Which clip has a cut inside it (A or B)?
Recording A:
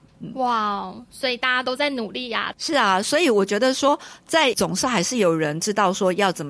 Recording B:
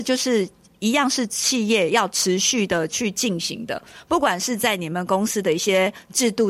A